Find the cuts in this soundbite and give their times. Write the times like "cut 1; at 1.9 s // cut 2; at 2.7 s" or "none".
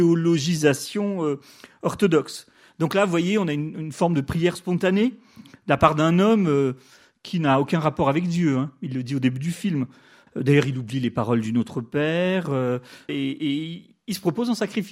cut 1; at 10.3 s // cut 2; at 13.1 s

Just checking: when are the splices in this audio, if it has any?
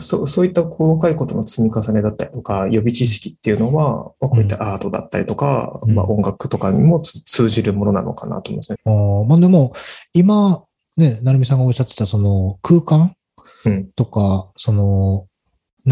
cut 1; at 8.8 s

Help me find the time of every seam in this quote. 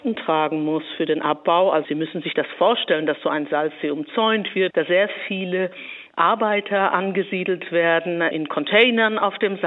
cut 1; at 4.7 s // cut 2; at 8.3 s

